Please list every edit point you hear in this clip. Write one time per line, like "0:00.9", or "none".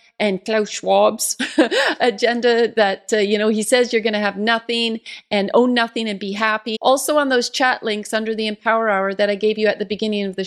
0:06.7